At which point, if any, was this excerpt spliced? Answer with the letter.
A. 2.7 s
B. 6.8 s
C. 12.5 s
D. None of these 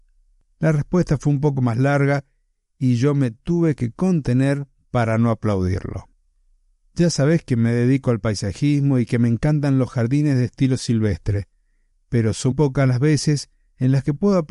C